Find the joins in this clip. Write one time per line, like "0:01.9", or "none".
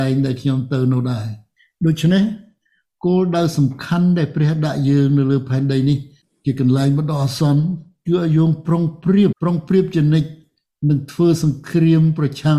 0:09.3